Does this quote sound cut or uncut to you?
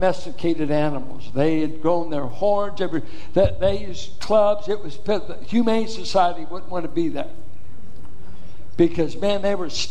uncut